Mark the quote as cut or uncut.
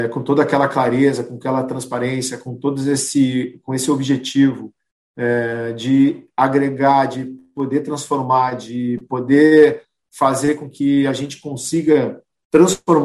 uncut